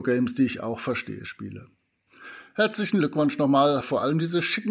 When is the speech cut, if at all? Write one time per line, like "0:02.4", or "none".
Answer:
0:03.8